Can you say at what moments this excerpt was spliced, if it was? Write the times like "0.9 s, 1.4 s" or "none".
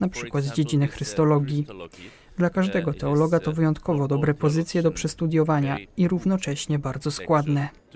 none